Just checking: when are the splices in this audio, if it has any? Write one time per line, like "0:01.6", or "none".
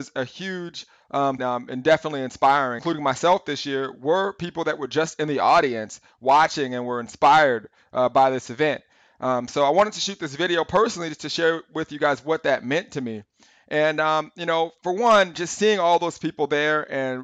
0:01.4
0:02.8